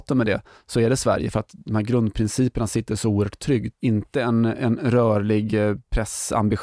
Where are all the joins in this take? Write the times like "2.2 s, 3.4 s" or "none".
3.7 s